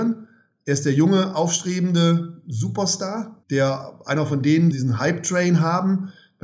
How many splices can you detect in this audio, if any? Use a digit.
2